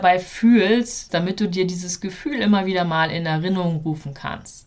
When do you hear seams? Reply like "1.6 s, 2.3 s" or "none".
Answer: 1.1 s